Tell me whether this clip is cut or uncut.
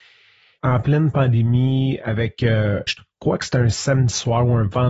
cut